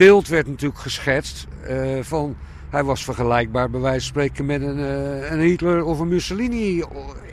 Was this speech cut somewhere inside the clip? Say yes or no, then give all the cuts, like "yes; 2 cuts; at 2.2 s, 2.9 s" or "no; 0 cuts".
no; 0 cuts